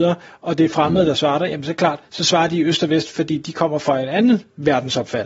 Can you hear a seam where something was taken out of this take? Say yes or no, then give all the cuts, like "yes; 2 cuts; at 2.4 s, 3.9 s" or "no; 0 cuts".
no; 0 cuts